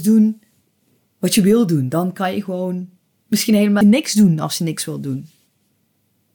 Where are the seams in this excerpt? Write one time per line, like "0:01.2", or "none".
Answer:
0:03.8